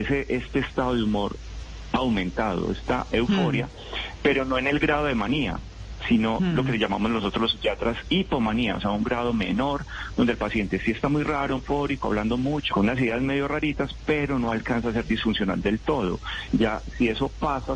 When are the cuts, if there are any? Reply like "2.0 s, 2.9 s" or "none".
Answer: 11.6 s, 12.7 s, 16.5 s

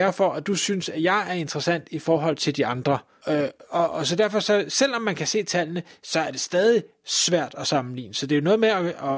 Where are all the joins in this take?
3.2 s

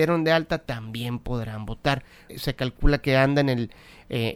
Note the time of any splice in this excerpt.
2.3 s

